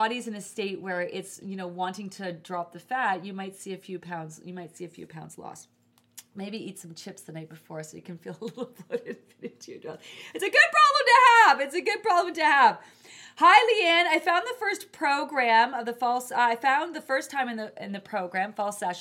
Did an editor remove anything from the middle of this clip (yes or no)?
no